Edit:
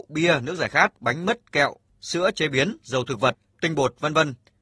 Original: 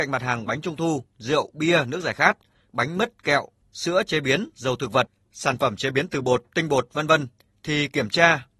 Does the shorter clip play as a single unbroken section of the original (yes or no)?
no